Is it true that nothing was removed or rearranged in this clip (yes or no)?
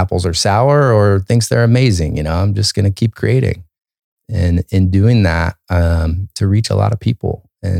no